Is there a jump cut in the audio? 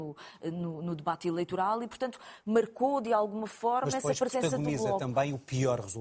no; 0 cuts

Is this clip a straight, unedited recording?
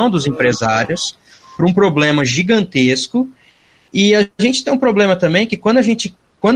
yes; 0 cuts

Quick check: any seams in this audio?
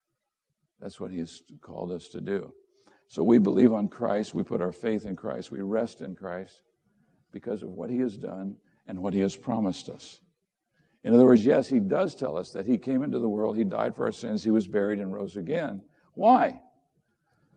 no; 0 cuts

